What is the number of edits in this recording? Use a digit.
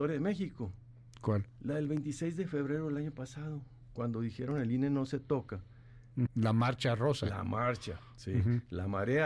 2